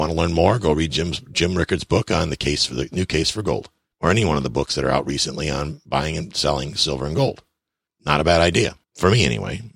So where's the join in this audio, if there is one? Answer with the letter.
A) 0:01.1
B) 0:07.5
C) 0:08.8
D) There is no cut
C